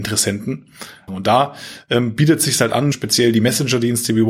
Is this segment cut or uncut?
cut